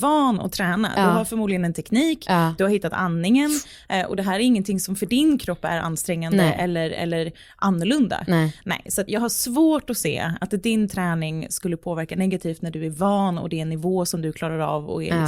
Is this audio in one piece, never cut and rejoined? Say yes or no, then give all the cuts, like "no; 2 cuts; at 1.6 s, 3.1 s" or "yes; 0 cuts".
no; 1 cut; at 9.1 s